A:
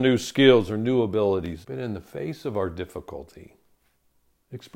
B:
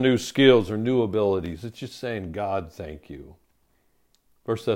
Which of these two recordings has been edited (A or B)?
A